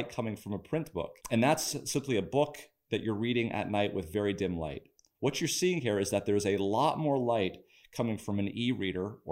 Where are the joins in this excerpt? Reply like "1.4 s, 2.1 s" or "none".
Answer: 1.2 s